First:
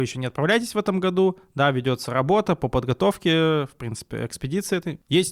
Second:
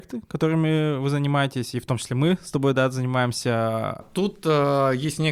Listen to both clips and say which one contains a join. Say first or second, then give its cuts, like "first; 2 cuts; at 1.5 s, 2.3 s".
second; 1 cut; at 4.0 s